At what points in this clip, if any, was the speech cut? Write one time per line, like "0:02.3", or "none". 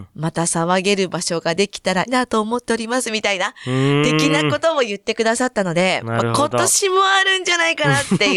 0:02.1